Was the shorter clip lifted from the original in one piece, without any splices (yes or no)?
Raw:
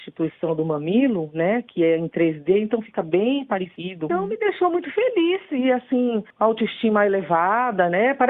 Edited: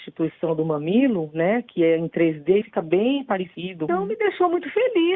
no